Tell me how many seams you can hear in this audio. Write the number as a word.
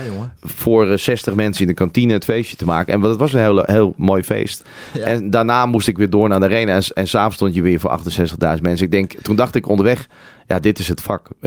zero